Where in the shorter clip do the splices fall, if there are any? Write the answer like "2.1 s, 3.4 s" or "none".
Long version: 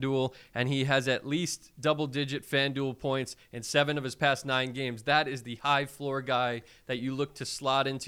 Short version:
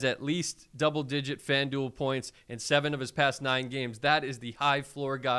none

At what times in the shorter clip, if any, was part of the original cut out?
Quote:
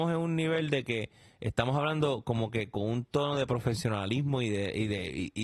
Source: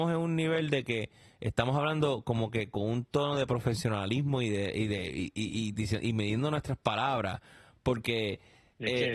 none

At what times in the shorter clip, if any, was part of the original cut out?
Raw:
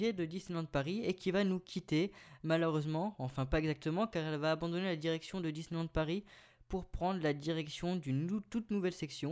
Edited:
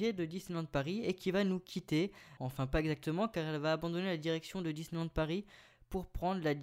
2.4 s

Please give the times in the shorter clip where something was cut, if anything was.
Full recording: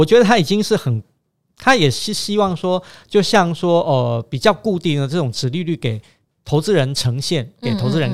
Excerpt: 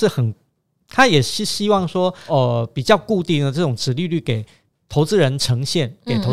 2.3 s

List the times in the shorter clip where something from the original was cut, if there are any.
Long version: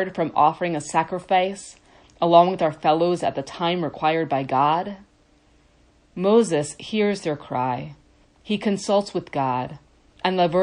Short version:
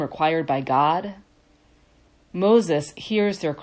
none

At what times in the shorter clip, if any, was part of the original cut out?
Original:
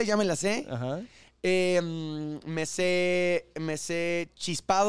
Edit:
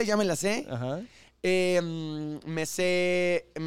none

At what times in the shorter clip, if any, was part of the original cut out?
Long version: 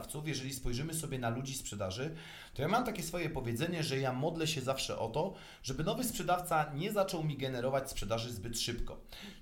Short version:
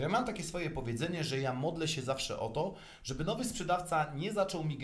none

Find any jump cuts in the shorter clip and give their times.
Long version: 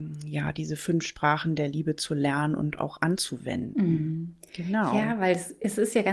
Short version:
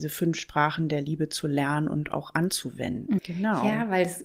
3.2 s

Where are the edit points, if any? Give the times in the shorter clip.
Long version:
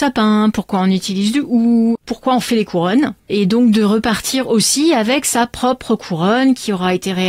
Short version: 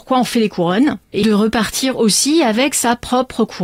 1.2 s

